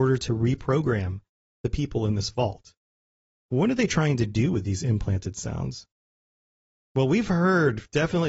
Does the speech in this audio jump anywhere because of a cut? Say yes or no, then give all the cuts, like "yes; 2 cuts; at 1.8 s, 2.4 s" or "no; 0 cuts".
yes; 1 cut; at 3.4 s